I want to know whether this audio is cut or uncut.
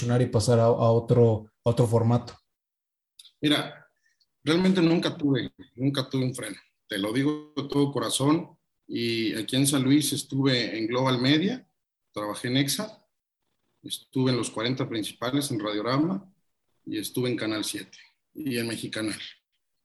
uncut